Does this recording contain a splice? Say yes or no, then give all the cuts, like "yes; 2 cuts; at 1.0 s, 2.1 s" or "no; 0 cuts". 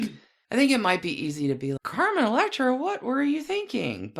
yes; 1 cut; at 1.8 s